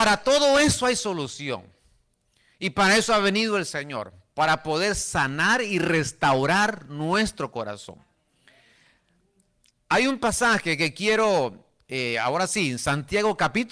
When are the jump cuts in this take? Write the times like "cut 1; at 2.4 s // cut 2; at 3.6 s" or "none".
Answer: none